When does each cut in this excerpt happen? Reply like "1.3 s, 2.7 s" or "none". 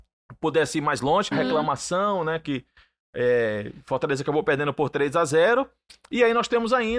1.3 s